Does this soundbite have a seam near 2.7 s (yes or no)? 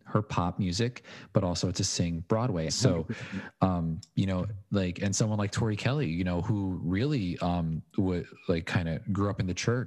yes